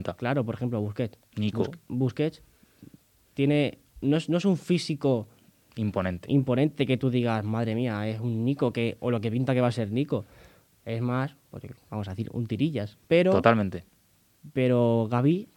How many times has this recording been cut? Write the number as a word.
one